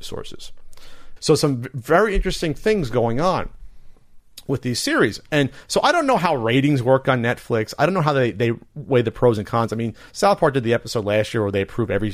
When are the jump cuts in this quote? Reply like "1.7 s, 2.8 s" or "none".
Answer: 1.2 s